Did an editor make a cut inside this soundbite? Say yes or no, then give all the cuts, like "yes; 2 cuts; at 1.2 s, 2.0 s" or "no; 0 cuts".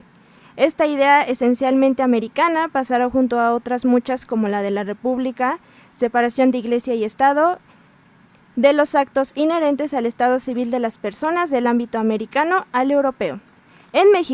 no; 0 cuts